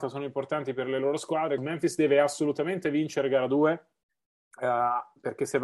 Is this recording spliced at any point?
yes; 1 cut; at 1.6 s

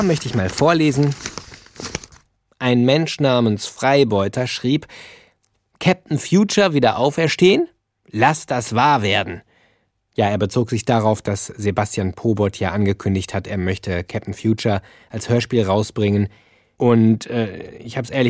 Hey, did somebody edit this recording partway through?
no; 0 cuts

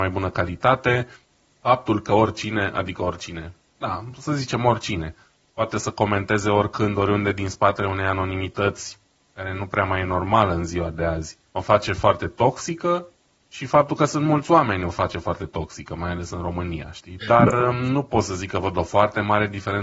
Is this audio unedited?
no; 2 cuts; at 11.5 s, 17.2 s

